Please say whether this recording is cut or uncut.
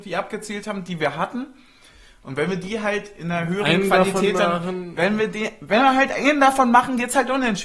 uncut